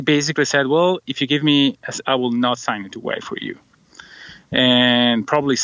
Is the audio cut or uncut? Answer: cut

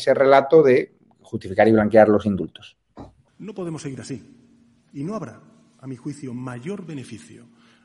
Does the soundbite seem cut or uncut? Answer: cut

